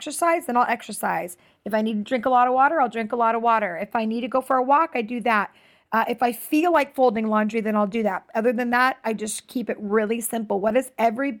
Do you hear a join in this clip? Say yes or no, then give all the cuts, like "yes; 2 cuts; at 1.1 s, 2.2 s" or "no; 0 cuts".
no; 0 cuts